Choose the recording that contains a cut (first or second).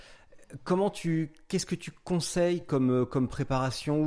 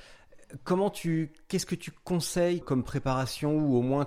second